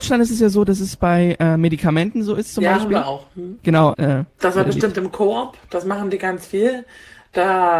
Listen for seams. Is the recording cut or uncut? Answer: cut